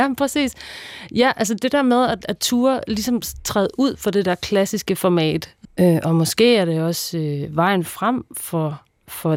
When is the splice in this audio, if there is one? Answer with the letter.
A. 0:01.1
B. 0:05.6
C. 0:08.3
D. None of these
B